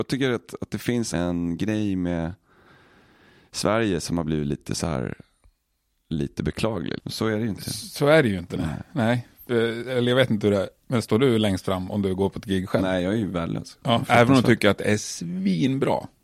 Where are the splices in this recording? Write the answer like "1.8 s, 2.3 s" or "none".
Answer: 1.1 s, 7.0 s